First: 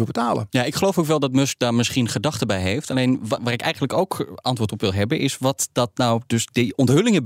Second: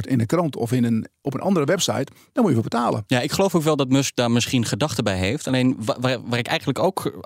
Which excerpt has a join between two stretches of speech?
first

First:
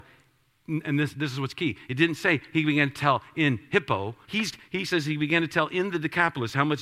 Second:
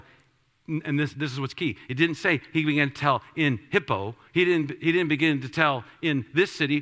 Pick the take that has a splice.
first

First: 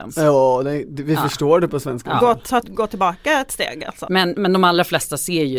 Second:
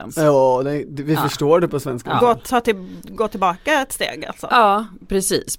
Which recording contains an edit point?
first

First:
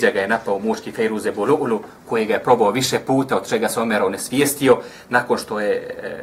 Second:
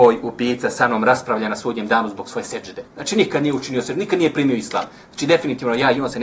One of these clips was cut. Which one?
second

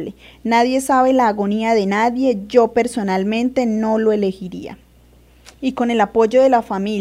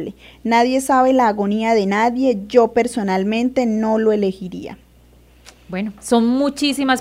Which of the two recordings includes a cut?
first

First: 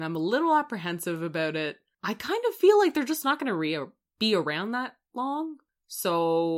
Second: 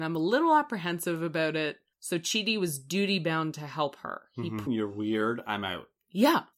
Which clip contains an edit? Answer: second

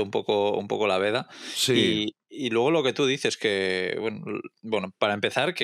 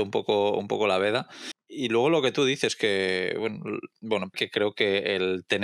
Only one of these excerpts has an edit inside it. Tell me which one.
second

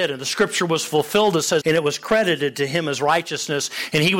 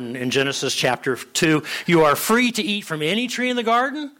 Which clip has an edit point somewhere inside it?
first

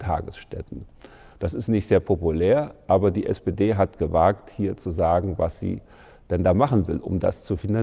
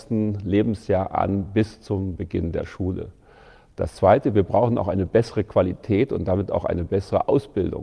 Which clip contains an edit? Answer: first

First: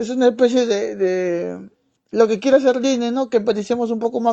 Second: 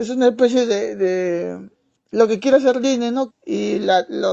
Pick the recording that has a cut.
second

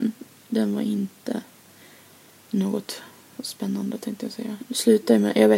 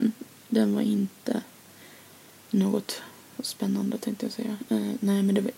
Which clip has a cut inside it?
first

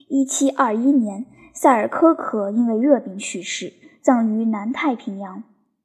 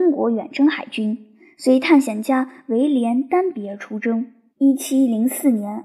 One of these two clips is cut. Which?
second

